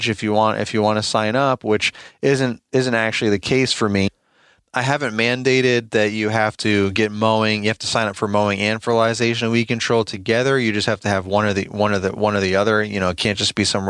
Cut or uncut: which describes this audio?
uncut